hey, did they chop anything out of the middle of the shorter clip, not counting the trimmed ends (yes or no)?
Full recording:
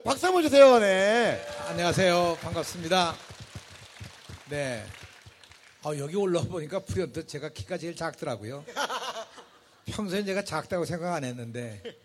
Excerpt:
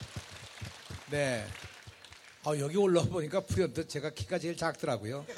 no